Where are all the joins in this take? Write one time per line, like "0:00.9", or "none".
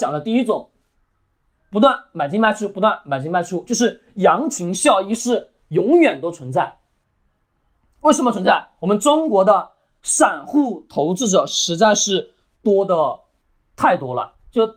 none